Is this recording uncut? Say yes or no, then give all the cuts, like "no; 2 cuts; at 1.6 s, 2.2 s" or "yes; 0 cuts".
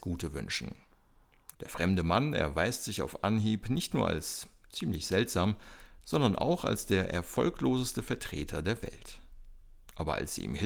no; 1 cut; at 1.5 s